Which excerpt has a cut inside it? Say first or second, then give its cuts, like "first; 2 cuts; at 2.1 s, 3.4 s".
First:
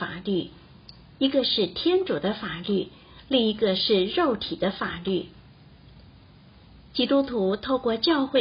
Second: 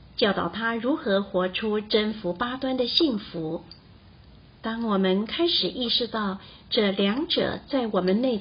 second; 1 cut; at 4.6 s